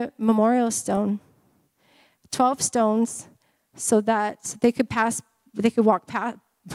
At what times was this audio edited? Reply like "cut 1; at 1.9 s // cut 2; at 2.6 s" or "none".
none